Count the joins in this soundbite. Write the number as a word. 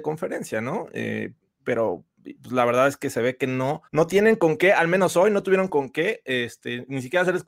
one